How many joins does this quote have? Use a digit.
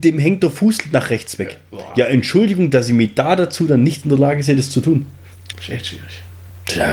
1